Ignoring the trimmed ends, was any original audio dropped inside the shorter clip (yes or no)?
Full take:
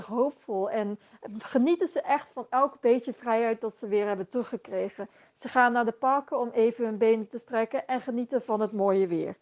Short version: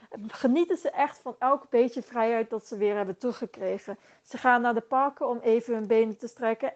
no